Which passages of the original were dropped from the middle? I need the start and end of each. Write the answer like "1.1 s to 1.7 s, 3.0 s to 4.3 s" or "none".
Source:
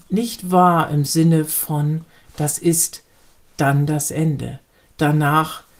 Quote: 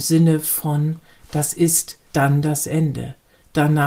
3.1 s to 3.5 s